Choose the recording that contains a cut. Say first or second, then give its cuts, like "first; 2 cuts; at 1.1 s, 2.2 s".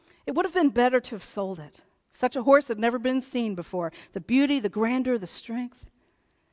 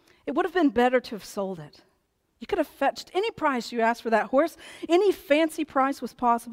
first; 1 cut; at 2.0 s